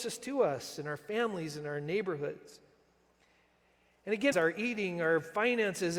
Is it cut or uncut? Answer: cut